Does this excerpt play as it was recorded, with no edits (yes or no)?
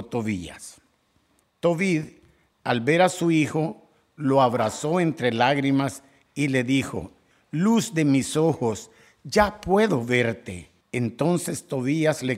no